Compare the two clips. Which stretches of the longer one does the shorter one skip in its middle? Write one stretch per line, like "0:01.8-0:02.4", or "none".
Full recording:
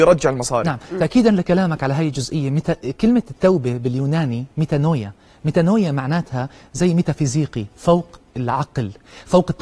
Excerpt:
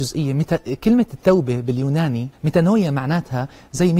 0:04.5-0:05.3